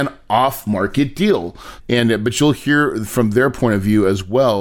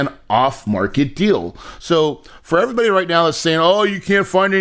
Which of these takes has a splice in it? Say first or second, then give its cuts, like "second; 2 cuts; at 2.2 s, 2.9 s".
first; 1 cut; at 1.8 s